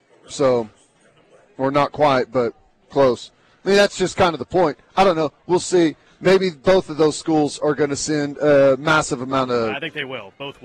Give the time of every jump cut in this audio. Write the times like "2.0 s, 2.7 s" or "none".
none